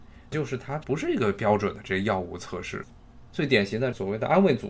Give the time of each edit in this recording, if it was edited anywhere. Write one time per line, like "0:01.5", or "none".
none